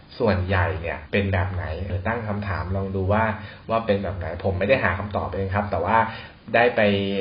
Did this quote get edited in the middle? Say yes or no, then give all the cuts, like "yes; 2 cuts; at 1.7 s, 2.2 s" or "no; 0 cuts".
yes; 1 cut; at 1.9 s